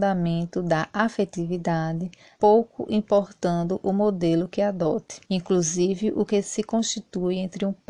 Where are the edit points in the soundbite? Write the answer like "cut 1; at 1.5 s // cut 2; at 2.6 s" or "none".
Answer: cut 1; at 2.4 s // cut 2; at 5.2 s